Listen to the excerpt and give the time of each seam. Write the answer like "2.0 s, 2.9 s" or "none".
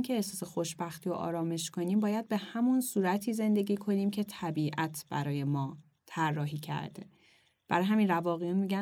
none